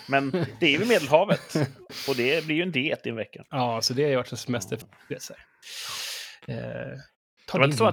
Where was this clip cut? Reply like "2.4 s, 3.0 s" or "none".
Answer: 3.5 s, 4.8 s